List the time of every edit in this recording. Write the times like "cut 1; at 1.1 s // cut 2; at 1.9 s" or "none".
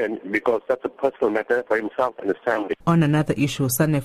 cut 1; at 2.8 s